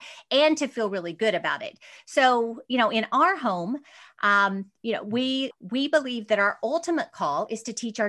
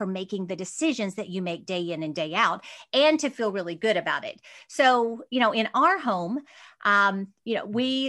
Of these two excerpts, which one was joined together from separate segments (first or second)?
first